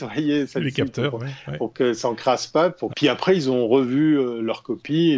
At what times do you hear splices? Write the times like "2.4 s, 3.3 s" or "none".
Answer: 2.9 s